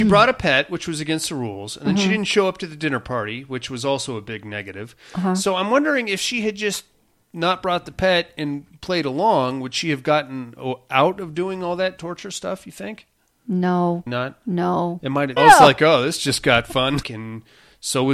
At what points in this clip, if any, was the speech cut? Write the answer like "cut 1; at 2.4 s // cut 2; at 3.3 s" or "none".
cut 1; at 14.1 s // cut 2; at 15.4 s // cut 3; at 17.0 s